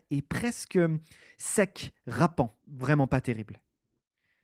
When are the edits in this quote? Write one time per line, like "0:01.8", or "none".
0:02.6